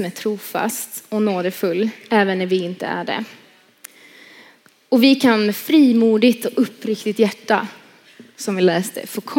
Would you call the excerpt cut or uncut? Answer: uncut